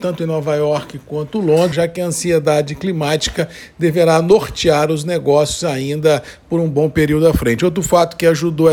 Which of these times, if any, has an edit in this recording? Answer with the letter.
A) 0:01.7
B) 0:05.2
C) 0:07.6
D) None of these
A